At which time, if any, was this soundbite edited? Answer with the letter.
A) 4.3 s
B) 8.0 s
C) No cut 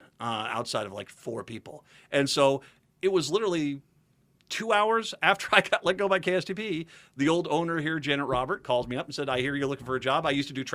C